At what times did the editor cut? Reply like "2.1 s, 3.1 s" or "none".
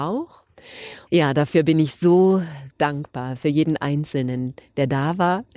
1.1 s, 2.7 s